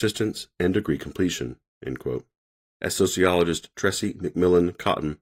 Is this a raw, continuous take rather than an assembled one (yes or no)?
yes